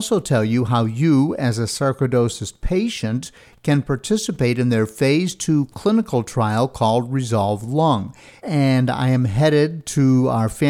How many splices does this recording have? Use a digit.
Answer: 1